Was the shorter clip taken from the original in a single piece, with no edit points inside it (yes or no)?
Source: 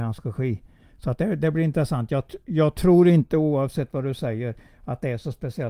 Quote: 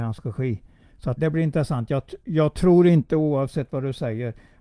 no